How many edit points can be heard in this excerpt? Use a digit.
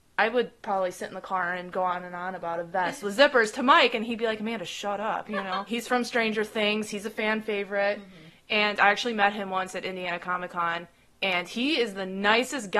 1